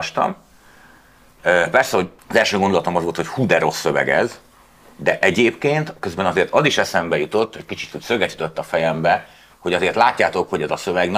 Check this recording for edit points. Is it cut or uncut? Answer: cut